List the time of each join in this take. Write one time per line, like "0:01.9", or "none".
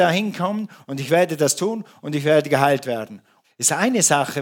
0:03.4